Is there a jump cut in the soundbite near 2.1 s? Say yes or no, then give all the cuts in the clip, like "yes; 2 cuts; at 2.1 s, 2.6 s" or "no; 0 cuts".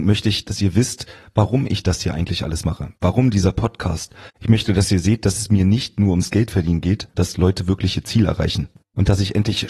no; 2 cuts; at 4.3 s, 7.1 s